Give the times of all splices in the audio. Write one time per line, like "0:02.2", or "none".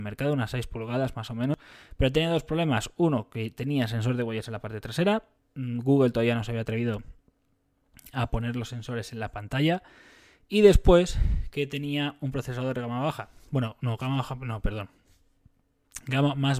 none